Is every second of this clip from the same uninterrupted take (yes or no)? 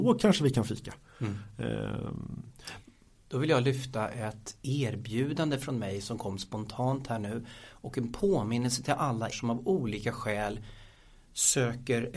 no